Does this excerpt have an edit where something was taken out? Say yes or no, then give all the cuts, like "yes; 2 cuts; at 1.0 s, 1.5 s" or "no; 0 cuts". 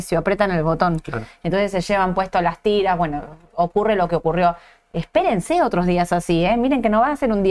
no; 0 cuts